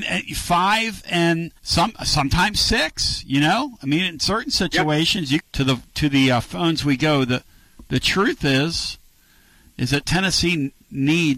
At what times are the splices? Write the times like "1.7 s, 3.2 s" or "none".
1.6 s, 5.4 s